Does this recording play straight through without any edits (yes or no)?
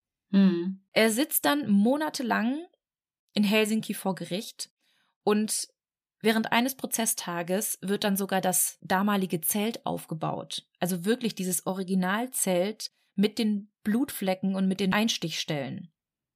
yes